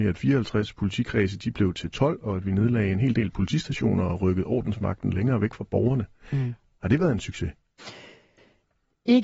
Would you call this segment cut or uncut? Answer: uncut